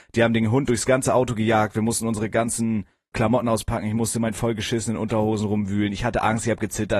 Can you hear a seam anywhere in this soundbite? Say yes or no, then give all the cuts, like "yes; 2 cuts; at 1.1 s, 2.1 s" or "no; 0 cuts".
yes; 1 cut; at 3.1 s